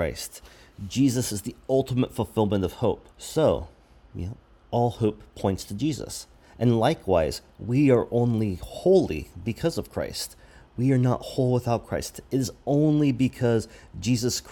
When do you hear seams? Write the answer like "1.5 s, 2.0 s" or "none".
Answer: 3.1 s

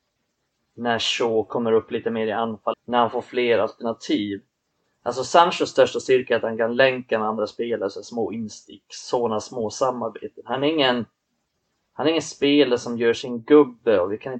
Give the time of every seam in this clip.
2.7 s

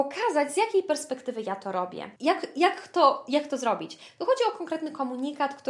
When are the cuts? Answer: 2.2 s

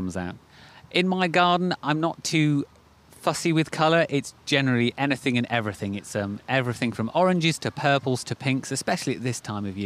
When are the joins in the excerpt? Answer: none

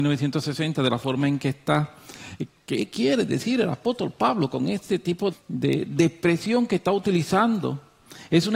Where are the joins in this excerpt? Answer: 2.5 s, 5.3 s

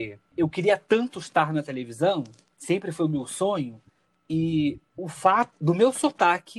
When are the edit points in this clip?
4.9 s

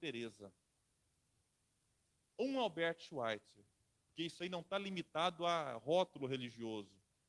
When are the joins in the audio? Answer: 3.9 s

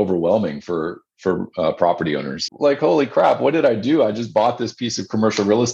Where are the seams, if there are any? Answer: 2.5 s

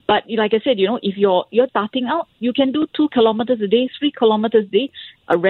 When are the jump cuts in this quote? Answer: 1.7 s

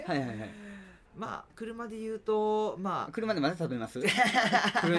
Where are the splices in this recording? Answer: 1.5 s

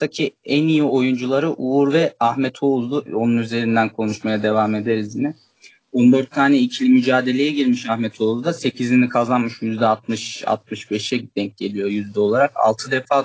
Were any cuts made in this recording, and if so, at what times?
3.1 s

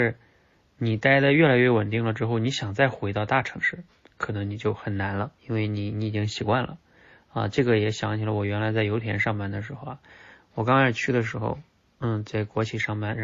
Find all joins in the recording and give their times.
5.4 s

